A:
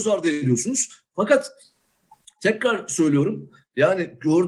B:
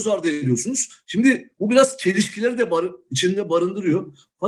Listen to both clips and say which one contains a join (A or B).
A